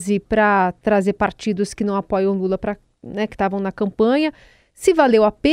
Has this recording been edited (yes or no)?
no